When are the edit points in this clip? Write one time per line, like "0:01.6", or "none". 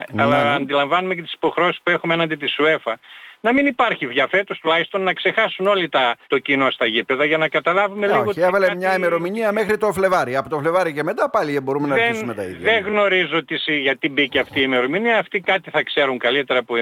0:06.2